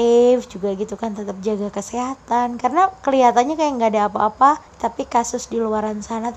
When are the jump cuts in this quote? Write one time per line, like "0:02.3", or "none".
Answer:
0:04.7